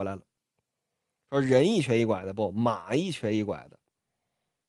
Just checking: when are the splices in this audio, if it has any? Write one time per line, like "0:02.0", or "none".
none